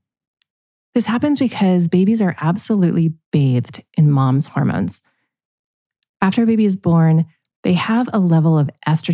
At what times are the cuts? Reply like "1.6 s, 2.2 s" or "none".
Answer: none